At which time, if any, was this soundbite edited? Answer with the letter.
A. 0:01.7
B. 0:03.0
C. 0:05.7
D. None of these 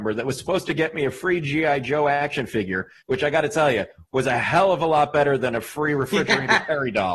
B